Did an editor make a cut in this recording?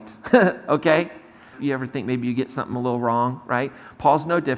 yes; 1 cut; at 1.5 s

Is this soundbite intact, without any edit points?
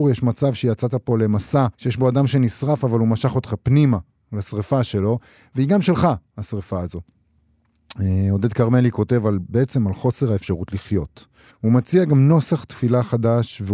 no; 2 cuts; at 1.7 s, 11.5 s

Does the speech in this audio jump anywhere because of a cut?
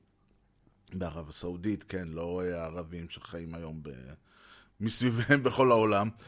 no; 0 cuts

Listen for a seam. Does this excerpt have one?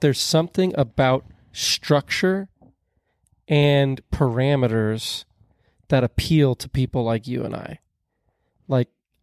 no; 0 cuts

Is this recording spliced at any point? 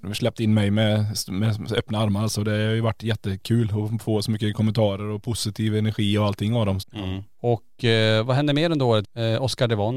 yes; 2 cuts; at 6.8 s, 9.0 s

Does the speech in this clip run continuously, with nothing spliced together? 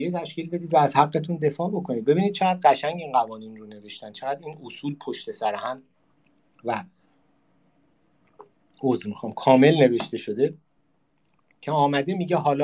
yes; 0 cuts

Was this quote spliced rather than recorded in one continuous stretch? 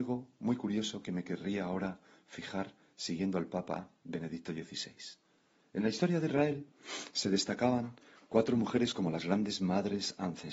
no; 0 cuts

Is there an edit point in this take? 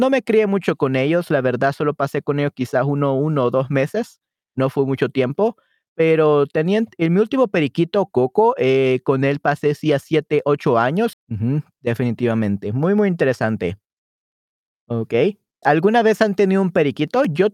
yes; 2 cuts; at 11.1 s, 15.6 s

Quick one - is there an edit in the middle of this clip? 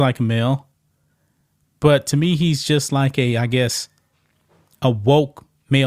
no; 0 cuts

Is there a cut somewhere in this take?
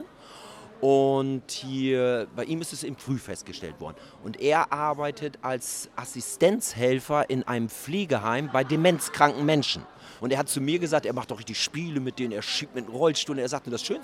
yes; 1 cut; at 10.2 s

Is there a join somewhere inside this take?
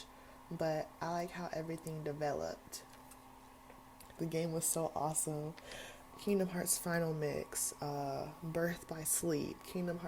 yes; 2 cuts; at 4.2 s, 6.1 s

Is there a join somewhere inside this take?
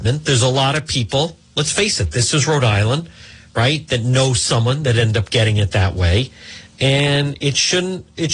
no; 0 cuts

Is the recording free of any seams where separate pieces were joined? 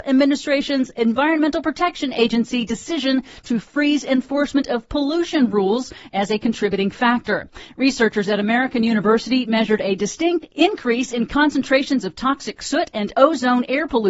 yes; 0 cuts

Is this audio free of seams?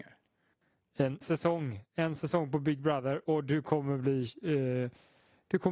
no; 1 cut; at 1.2 s

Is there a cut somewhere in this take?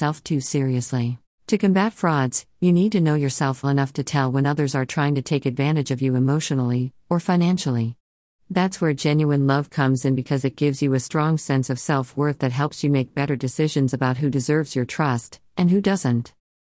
yes; 2 cuts; at 1.3 s, 3.6 s

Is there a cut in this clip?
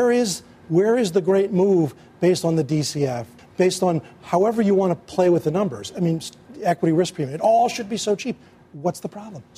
yes; 1 cut; at 3.4 s

